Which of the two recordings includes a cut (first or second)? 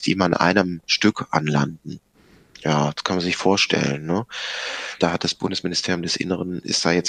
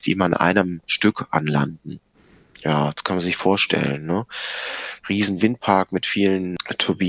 first